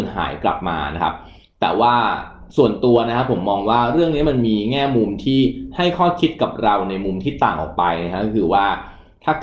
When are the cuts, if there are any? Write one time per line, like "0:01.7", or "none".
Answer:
none